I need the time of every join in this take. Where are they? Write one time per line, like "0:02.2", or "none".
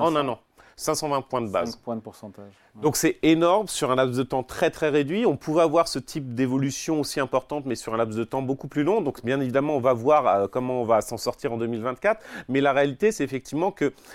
none